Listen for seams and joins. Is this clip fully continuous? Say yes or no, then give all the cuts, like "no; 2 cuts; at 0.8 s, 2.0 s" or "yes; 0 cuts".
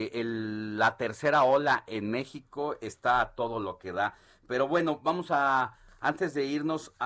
yes; 0 cuts